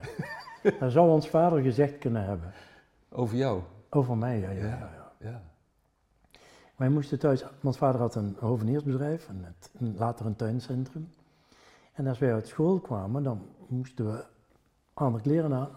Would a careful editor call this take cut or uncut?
uncut